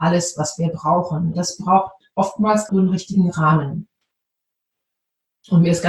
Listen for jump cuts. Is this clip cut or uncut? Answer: cut